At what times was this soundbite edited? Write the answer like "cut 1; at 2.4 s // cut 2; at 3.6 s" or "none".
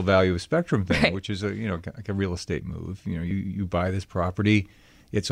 none